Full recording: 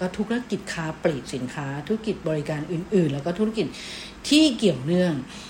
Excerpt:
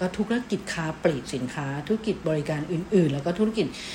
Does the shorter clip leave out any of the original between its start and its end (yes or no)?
no